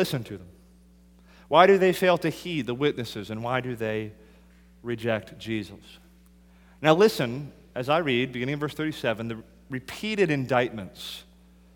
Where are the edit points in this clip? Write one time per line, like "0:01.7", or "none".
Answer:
none